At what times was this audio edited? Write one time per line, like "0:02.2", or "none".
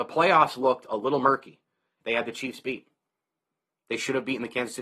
0:02.0